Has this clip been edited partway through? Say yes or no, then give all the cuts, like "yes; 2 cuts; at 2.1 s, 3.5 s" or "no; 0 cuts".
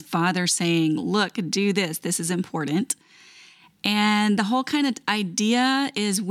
no; 0 cuts